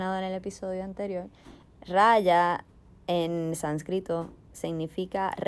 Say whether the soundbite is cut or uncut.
cut